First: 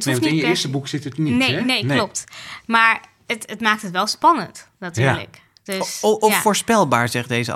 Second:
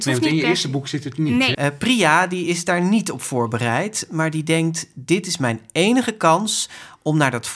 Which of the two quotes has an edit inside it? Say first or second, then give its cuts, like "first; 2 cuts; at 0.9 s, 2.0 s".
second; 1 cut; at 1.5 s